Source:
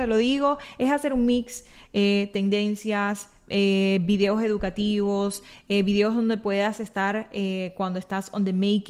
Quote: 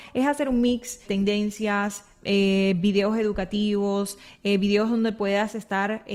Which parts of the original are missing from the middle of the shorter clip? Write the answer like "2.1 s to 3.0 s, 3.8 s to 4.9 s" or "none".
1.7 s to 2.3 s